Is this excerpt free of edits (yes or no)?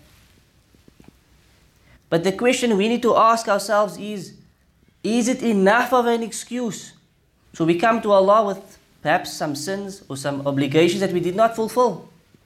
no